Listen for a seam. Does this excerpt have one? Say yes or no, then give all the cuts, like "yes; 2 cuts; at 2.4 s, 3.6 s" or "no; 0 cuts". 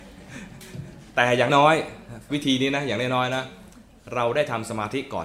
yes; 1 cut; at 1.5 s